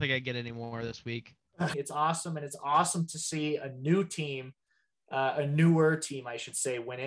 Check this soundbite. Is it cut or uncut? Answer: cut